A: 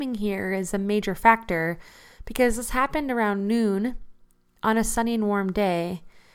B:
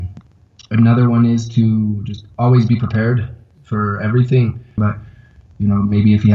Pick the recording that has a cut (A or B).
B